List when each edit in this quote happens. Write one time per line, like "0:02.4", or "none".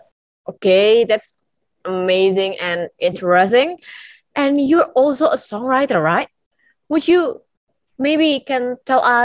none